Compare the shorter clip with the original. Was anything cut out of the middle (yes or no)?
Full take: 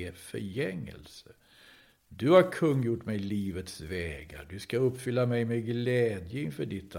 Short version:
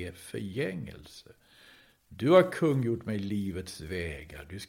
no